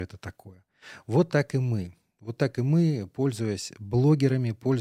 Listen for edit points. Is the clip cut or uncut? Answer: uncut